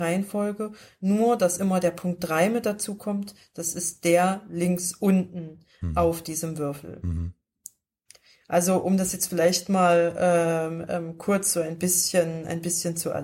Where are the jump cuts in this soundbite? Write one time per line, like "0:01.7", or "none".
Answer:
none